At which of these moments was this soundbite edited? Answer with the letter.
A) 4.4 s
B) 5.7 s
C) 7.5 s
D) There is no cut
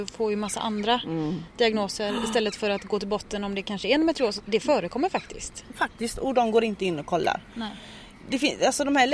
A